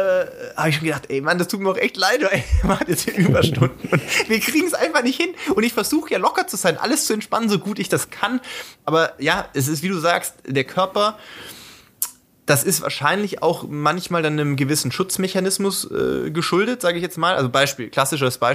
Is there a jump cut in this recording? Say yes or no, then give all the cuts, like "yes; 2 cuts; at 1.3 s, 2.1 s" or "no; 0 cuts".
no; 0 cuts